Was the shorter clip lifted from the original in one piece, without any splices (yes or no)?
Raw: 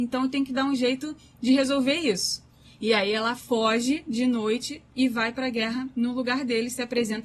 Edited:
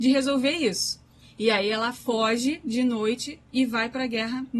yes